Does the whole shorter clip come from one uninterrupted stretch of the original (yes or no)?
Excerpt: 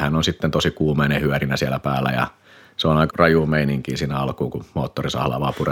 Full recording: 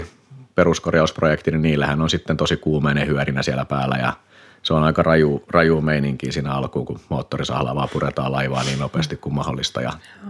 no